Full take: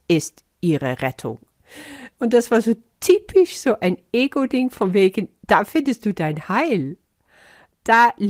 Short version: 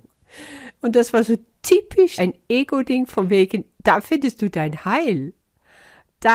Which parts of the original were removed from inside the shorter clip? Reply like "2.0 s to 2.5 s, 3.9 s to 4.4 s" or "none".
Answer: 3.5 s to 3.8 s